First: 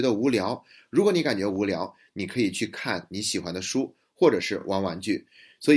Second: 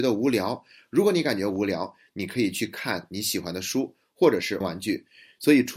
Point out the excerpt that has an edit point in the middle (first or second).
second